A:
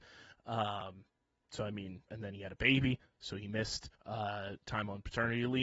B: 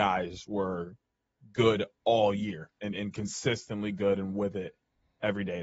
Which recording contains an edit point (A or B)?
A